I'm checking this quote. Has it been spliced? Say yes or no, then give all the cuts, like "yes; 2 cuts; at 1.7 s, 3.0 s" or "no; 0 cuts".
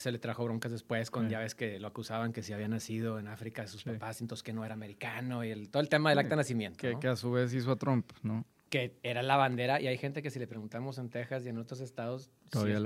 no; 0 cuts